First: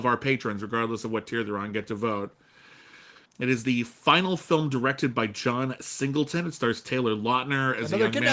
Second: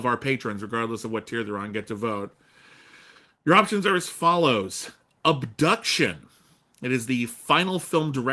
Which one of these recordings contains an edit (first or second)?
first